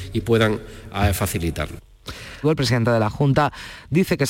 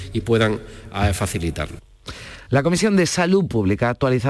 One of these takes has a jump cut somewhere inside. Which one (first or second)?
first